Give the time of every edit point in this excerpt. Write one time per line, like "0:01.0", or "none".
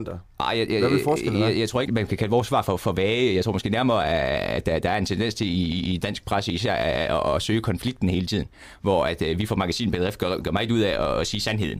0:01.9